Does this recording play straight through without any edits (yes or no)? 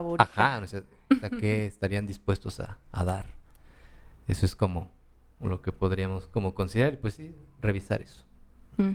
yes